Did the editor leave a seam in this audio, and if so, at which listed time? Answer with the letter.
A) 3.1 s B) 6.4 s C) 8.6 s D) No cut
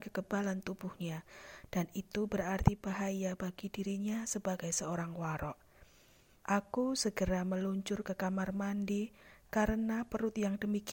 D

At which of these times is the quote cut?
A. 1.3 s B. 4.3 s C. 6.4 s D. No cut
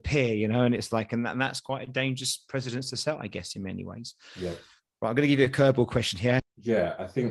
C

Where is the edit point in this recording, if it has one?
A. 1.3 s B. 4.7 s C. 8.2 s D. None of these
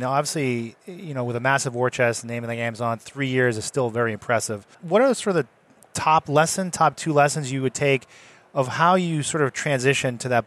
B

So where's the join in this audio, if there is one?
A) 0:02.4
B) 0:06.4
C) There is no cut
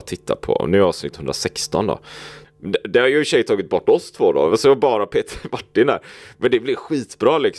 A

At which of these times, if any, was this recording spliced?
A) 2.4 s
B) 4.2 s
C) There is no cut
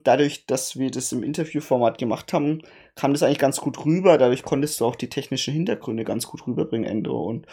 C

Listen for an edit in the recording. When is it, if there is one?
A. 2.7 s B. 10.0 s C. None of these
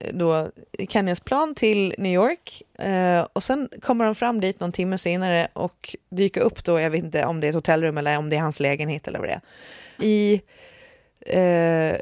B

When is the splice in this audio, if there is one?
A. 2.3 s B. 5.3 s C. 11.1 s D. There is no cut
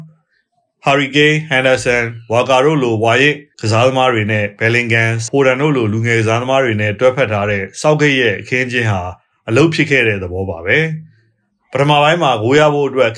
B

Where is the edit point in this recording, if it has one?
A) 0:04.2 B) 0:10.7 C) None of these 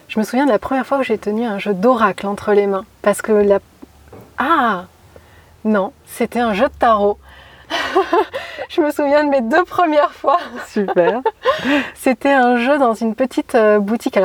C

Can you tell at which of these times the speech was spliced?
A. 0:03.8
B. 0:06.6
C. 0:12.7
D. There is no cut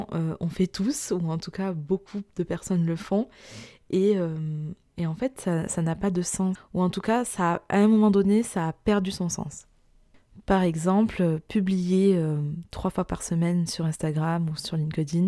B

